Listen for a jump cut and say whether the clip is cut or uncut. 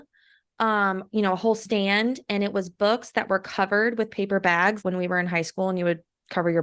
cut